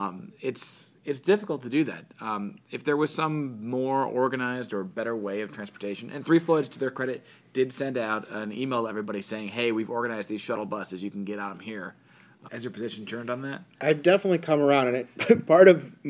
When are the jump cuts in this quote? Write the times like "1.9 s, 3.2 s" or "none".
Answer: 12.5 s